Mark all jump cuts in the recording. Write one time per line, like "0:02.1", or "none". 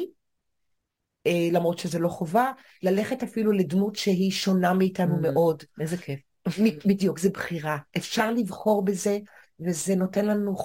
none